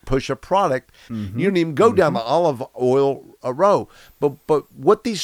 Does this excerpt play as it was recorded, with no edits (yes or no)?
no